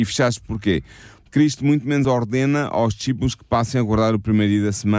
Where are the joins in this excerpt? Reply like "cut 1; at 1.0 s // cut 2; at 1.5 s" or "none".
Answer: cut 1; at 1.2 s